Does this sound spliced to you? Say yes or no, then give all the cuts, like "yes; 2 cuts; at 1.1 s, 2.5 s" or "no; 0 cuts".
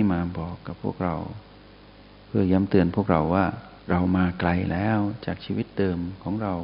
yes; 1 cut; at 3.8 s